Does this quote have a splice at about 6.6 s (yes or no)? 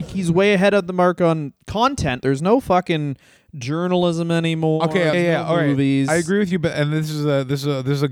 no